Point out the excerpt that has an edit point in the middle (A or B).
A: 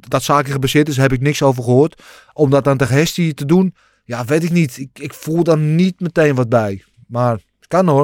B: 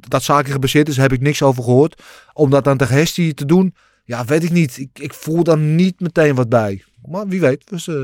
B